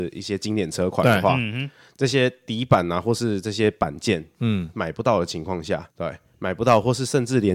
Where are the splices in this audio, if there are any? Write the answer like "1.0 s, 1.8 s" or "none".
5.9 s

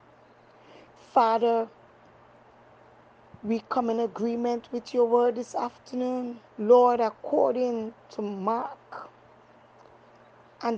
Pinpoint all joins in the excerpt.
6.5 s

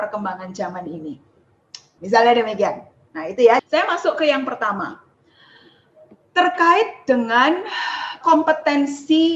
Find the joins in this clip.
2.0 s, 3.6 s, 8.2 s

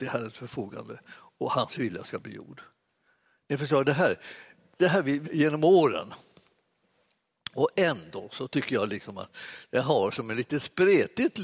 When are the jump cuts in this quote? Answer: 5.2 s

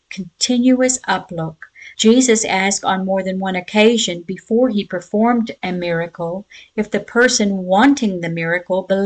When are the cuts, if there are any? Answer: 1.9 s, 5.6 s

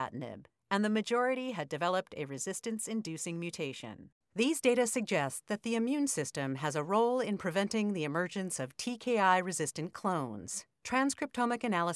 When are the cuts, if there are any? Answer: none

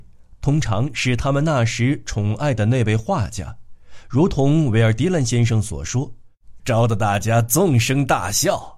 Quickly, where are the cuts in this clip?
6.6 s

